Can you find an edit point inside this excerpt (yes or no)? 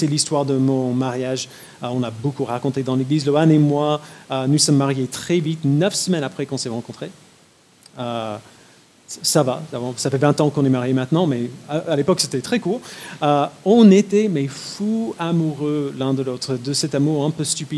no